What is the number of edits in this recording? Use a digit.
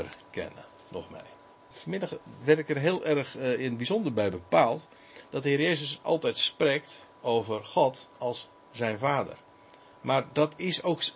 2